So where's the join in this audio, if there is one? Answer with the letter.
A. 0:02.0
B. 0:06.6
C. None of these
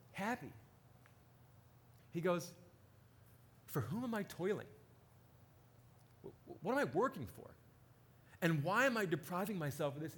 A